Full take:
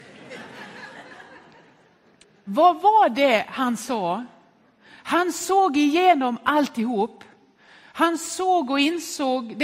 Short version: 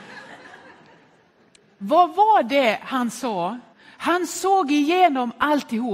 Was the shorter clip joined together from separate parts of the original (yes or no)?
yes